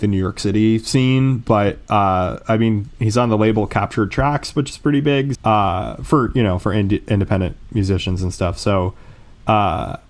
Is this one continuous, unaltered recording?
no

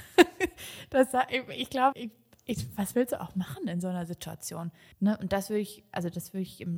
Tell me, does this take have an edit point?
yes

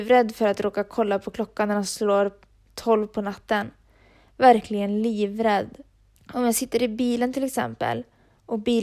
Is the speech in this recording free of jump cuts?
no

